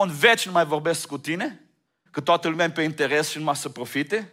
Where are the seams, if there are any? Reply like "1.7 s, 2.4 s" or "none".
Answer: 2.1 s